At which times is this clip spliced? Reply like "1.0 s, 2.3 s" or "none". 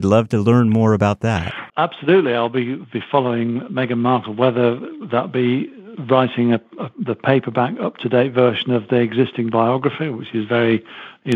1.7 s

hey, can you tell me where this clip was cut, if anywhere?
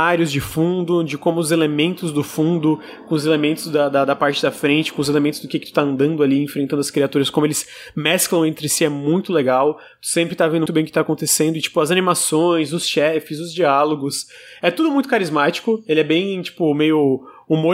10.7 s

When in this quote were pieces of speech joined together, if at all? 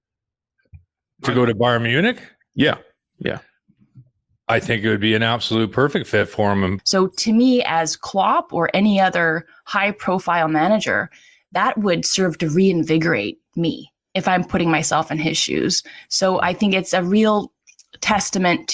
6.8 s

